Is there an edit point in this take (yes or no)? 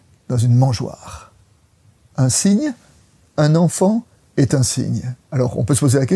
yes